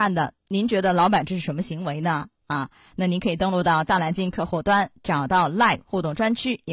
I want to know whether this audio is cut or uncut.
uncut